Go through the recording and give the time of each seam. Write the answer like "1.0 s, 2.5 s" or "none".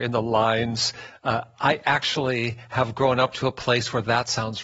none

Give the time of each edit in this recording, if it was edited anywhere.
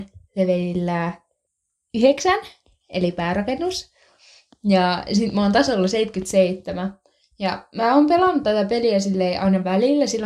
none

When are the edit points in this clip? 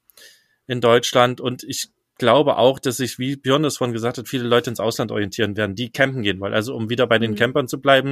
none

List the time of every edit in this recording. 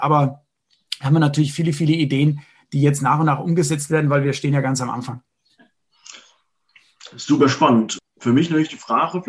8.0 s

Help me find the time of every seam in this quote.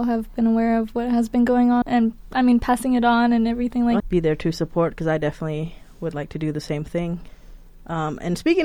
1.8 s, 4.0 s

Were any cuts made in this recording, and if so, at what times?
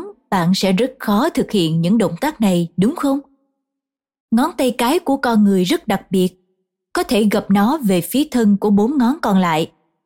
none

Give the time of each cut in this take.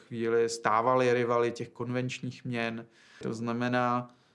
3.2 s

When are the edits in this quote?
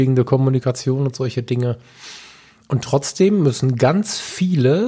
none

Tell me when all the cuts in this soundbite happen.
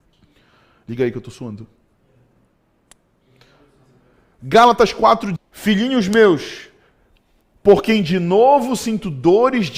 5.4 s

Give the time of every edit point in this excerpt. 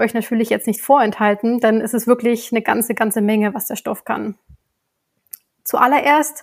none

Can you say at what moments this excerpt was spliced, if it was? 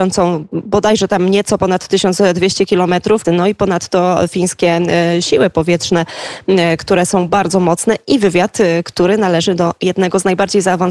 3.2 s

